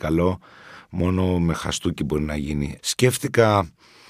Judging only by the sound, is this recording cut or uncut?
cut